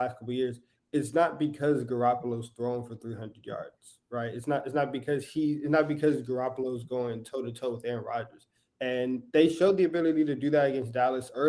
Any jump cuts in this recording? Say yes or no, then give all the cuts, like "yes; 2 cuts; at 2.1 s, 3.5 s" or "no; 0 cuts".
yes; 1 cut; at 8.7 s